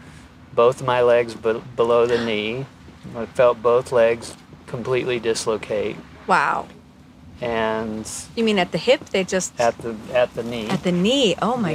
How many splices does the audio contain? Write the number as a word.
zero